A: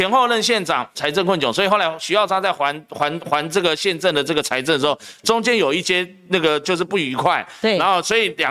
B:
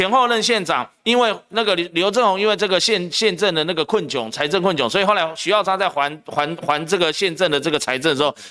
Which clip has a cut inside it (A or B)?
A